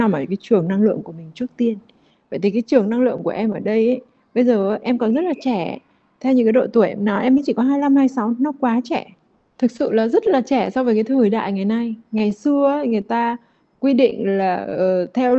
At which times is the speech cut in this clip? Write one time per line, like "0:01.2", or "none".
none